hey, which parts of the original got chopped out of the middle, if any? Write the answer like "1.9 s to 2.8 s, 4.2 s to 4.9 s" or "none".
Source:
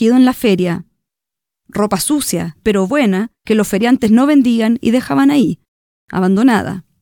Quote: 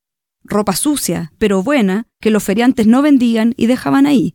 none